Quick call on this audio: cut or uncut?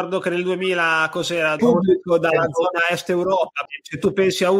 cut